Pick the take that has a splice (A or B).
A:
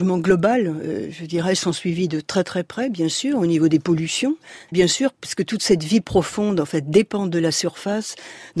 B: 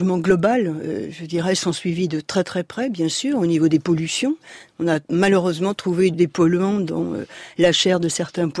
A